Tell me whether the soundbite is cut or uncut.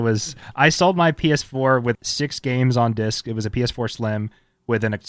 cut